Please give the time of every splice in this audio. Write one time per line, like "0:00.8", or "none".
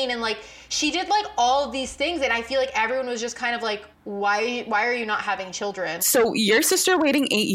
0:03.9
0:06.0